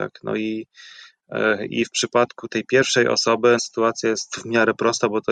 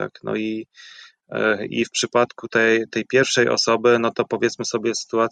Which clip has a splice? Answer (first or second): first